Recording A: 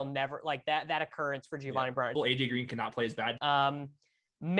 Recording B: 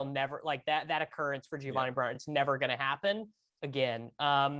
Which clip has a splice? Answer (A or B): A